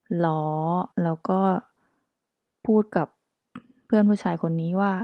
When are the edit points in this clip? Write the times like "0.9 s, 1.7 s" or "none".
0.9 s